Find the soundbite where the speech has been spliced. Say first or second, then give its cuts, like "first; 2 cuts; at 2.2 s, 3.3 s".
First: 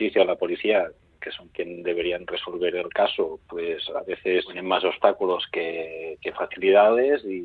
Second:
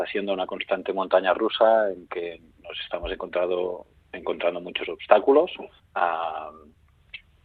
second; 1 cut; at 5.8 s